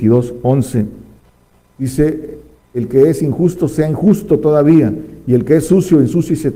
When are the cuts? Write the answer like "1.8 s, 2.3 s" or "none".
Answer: none

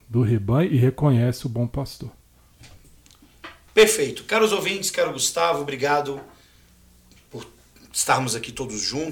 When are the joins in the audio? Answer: none

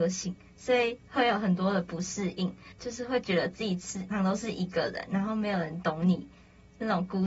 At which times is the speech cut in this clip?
2.7 s, 4.1 s

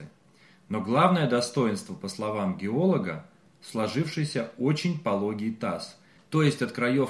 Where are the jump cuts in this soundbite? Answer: none

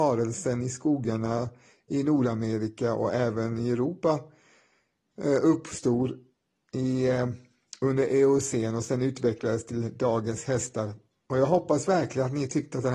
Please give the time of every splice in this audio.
none

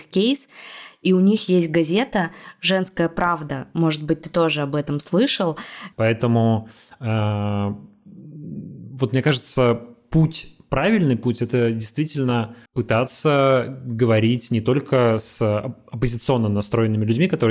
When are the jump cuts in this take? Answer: 5.9 s, 12.7 s

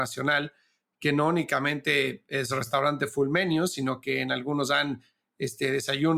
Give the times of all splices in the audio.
none

